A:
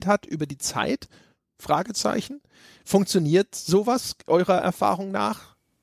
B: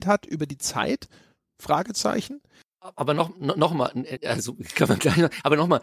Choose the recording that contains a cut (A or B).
B